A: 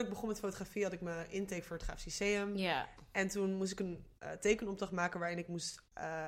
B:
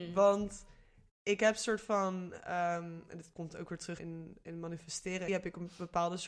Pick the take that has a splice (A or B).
B